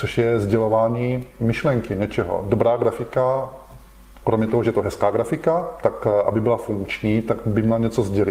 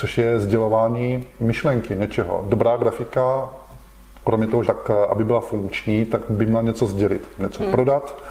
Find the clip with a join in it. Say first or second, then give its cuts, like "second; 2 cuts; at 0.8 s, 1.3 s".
second; 1 cut; at 4.6 s